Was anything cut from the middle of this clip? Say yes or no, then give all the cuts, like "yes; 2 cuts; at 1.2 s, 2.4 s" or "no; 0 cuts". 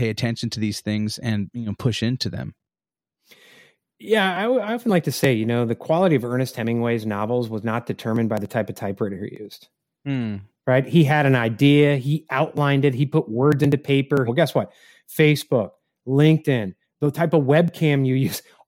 yes; 2 cuts; at 14.3 s, 16.8 s